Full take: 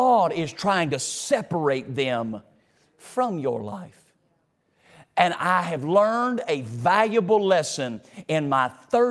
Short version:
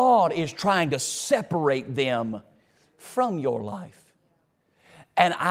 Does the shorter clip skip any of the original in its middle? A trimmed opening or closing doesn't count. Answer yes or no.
no